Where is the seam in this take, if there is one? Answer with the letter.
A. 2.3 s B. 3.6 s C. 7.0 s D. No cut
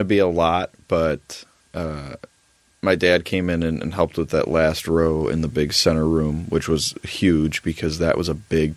D